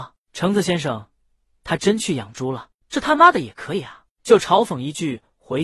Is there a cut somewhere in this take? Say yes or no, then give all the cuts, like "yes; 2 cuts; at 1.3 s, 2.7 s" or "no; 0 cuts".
yes; 1 cut; at 2.8 s